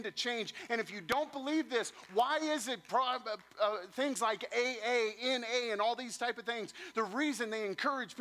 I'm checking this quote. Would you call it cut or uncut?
uncut